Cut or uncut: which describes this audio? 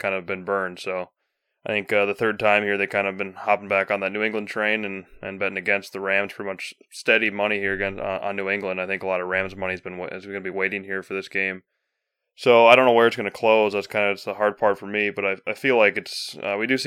uncut